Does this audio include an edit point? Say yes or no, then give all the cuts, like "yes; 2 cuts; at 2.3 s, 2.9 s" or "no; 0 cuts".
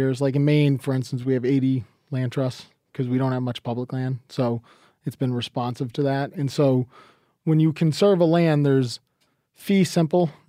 no; 0 cuts